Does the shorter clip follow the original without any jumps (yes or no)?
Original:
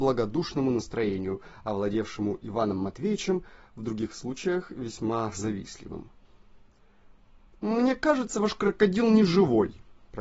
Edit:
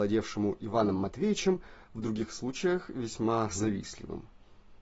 yes